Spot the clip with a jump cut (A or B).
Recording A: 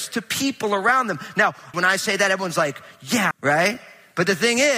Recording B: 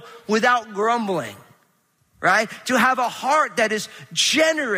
A